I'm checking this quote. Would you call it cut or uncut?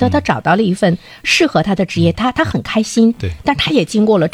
uncut